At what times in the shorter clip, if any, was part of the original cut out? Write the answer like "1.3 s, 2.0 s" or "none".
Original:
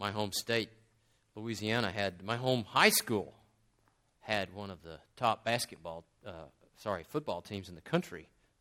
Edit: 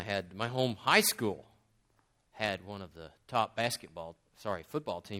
4.3 s